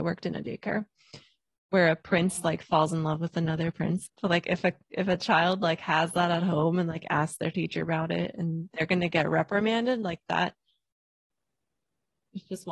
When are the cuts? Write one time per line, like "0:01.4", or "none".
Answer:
0:04.1